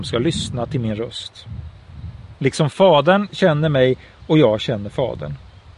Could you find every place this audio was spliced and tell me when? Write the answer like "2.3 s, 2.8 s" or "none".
2.4 s